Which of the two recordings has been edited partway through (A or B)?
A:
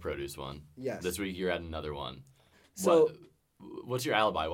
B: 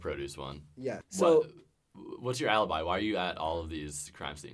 B